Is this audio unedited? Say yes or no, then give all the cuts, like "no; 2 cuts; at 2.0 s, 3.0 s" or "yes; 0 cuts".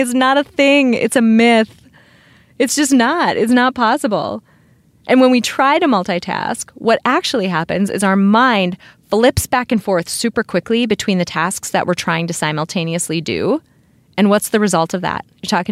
yes; 0 cuts